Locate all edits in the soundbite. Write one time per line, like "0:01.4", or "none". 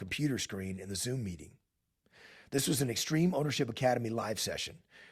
none